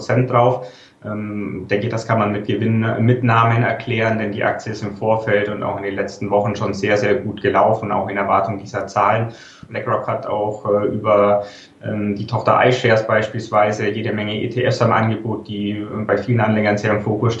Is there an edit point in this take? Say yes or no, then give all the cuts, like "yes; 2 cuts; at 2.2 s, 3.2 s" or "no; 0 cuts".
yes; 1 cut; at 9.7 s